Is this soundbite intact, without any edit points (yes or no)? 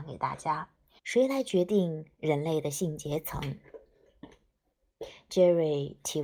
no